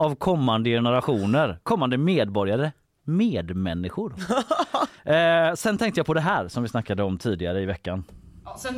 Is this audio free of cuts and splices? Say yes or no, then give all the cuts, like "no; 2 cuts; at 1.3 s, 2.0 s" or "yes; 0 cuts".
no; 1 cut; at 5.0 s